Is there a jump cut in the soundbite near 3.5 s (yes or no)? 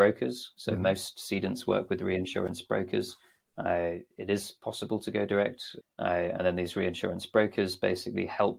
no